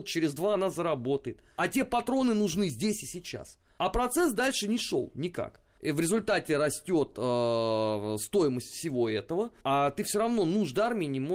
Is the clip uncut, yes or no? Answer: yes